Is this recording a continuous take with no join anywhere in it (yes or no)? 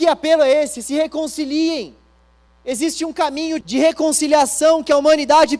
no